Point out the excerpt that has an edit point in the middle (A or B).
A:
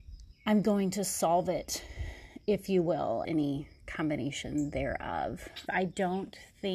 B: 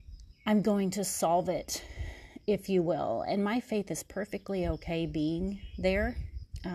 A